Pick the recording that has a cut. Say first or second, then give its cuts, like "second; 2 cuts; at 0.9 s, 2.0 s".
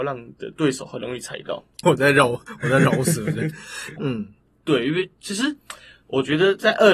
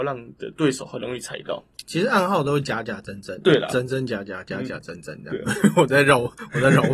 first; 2 cuts; at 1.8 s, 4.0 s